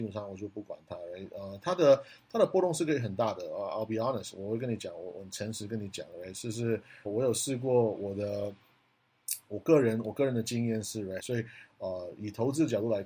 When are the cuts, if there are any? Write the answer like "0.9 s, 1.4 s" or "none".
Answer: 7.1 s, 11.2 s